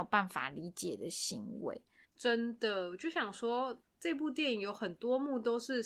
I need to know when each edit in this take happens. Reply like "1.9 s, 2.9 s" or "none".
2.0 s, 3.8 s